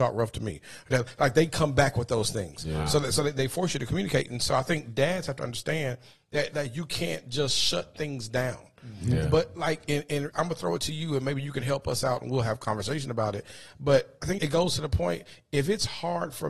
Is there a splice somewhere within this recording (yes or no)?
yes